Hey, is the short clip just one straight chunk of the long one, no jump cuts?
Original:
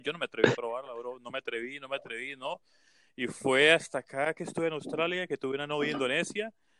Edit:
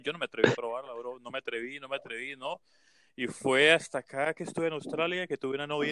yes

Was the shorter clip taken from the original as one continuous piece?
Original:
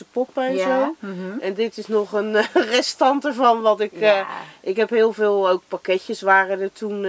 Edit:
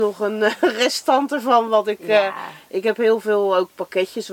yes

